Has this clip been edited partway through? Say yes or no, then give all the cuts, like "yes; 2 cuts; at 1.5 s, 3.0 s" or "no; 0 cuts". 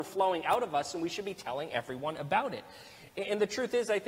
no; 0 cuts